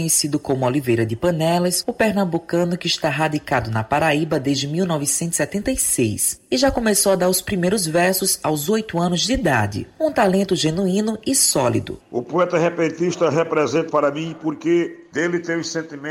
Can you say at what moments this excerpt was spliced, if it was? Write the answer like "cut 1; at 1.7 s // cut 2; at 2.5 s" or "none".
cut 1; at 12.0 s // cut 2; at 13.9 s

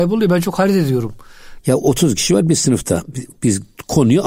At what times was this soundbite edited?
cut 1; at 1.6 s

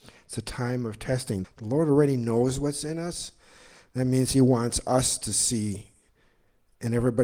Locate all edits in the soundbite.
cut 1; at 1.4 s

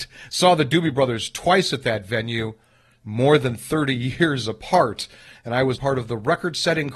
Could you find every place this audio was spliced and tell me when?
cut 1; at 5.7 s

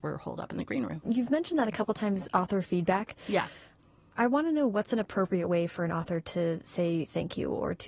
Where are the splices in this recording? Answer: cut 1; at 1.0 s

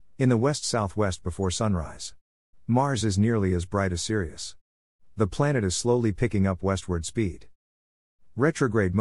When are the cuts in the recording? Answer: cut 1; at 2.5 s

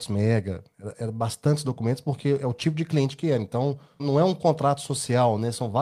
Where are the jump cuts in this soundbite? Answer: cut 1; at 4.0 s

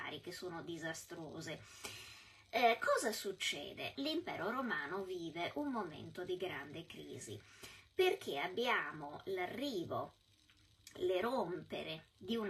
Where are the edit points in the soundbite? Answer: cut 1; at 3.9 s

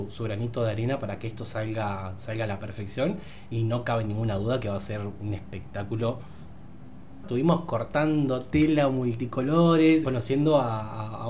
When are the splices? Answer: cut 1; at 7.2 s // cut 2; at 10.0 s

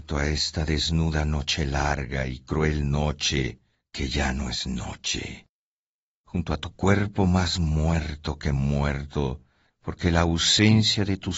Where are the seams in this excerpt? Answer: cut 1; at 9.7 s

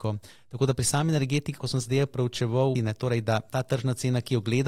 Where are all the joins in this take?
cut 1; at 1.6 s // cut 2; at 2.7 s

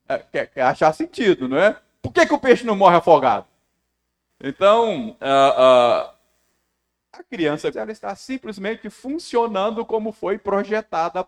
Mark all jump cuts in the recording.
cut 1; at 4.3 s // cut 2; at 7.7 s

